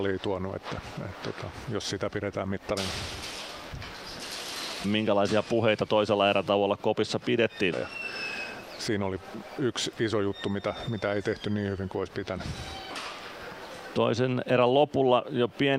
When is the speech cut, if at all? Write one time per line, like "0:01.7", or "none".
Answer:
0:07.7

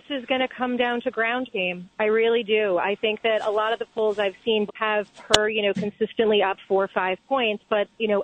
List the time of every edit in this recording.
0:04.7

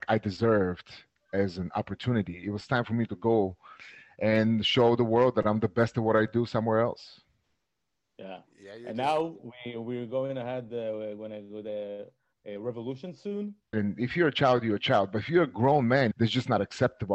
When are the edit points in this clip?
0:13.7
0:16.1

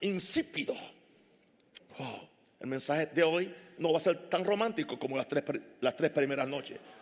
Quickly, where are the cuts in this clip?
0:01.8
0:03.8

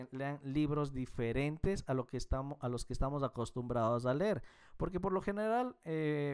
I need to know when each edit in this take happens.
none

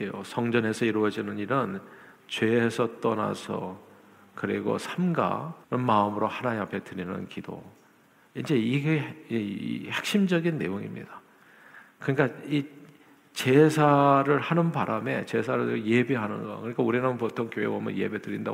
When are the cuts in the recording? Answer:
0:05.6

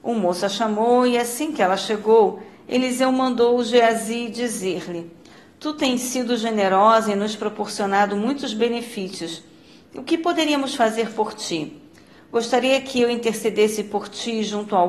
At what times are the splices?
none

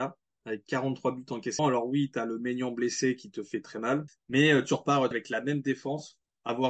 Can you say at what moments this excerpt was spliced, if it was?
0:01.6
0:04.1
0:05.1

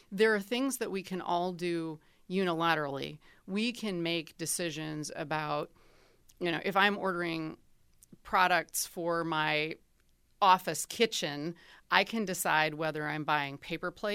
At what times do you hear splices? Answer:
none

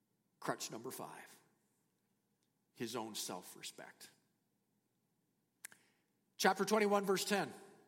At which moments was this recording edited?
none

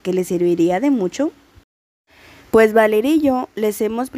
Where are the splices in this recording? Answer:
none

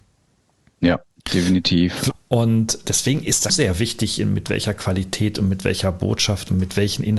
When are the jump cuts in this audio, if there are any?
0:02.1
0:03.5

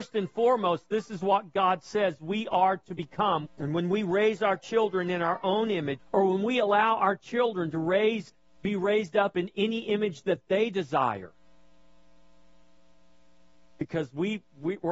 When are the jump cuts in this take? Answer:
0:03.4
0:06.0

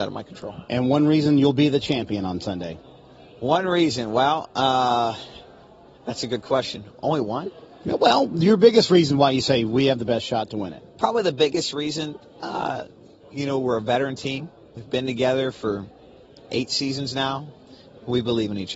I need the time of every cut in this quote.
none

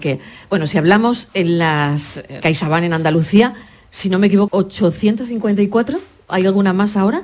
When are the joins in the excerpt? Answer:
0:02.4
0:04.5

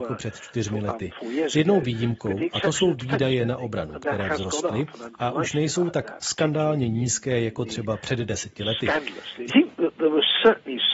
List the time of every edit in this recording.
0:09.5

